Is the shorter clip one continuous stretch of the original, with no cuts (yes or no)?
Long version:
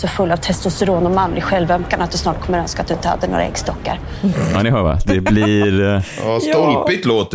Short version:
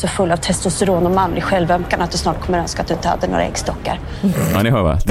yes